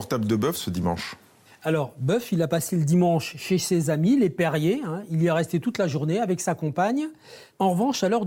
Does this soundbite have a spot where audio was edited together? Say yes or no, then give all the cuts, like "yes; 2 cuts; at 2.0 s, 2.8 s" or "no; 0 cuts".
no; 0 cuts